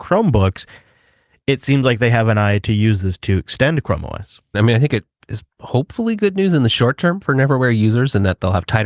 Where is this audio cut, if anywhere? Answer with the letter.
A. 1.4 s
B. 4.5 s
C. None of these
B